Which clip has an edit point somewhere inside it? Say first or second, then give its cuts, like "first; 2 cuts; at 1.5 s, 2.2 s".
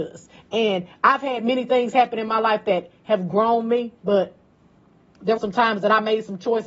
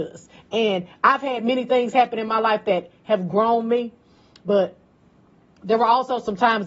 first; 2 cuts; at 4.0 s, 5.4 s